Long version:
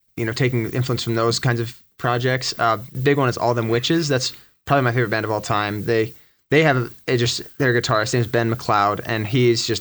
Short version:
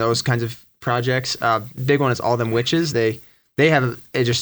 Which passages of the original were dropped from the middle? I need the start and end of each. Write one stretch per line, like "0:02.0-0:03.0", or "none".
0:04.1-0:05.8